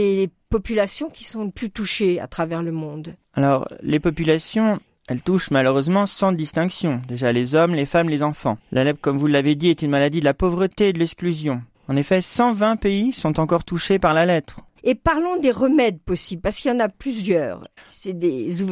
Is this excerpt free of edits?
no; 1 cut; at 14.8 s

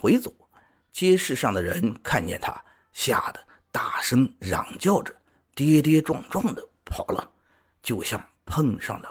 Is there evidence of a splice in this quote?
no; 0 cuts

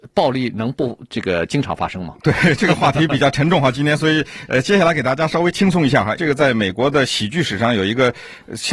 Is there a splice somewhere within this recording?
yes; 1 cut; at 6.2 s

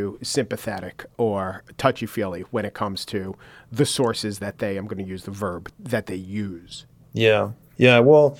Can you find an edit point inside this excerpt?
no; 0 cuts

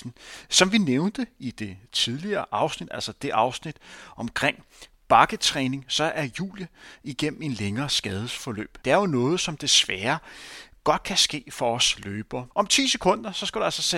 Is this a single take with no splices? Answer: no; 2 cuts; at 8.8 s, 12.5 s

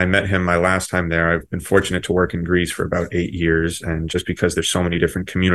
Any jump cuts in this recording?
no; 0 cuts

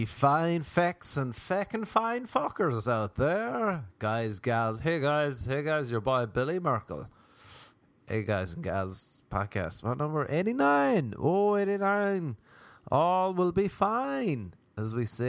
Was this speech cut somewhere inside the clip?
no; 0 cuts

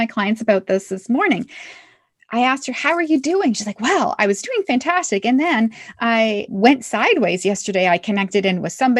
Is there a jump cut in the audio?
no; 0 cuts

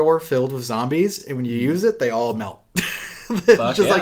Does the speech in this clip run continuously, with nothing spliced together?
yes; 0 cuts

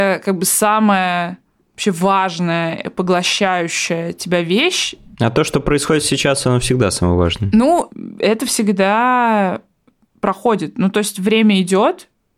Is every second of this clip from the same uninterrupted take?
yes; 0 cuts

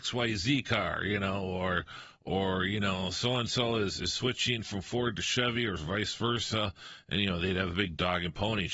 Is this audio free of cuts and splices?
yes; 0 cuts

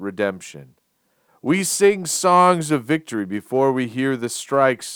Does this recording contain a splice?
yes; 1 cut; at 1.3 s

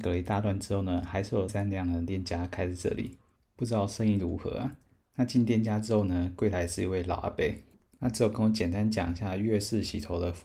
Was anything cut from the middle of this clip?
yes; 1 cut; at 1.5 s

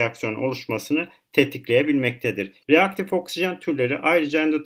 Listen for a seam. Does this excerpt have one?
yes; 1 cut; at 2.6 s

